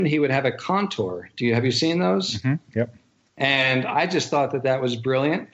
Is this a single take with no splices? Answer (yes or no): yes